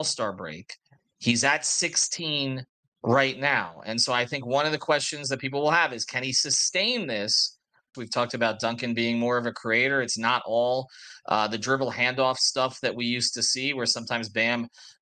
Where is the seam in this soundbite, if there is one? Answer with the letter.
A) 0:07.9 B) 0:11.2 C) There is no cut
A